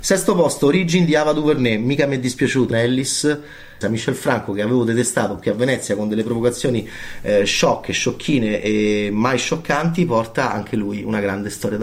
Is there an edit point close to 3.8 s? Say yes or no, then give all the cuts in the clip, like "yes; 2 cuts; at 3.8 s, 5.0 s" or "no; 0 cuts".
yes; 2 cuts; at 2.7 s, 3.8 s